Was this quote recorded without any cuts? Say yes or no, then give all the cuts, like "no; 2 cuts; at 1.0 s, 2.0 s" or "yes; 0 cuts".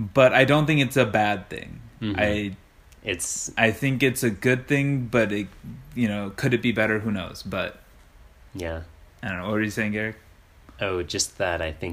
yes; 0 cuts